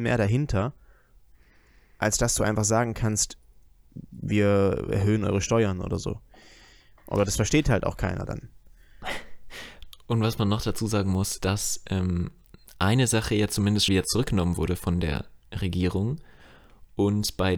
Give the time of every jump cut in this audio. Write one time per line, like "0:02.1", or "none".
0:11.4
0:13.9